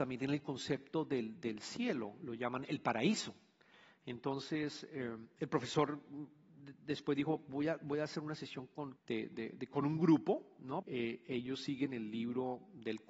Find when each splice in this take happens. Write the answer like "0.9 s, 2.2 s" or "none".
9.0 s, 10.8 s